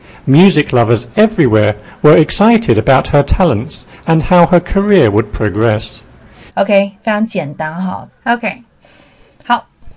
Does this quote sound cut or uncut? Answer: cut